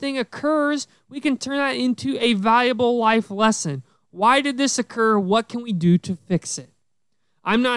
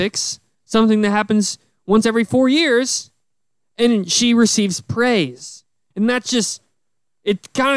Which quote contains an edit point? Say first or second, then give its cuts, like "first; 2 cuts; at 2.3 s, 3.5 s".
second; 1 cut; at 5.9 s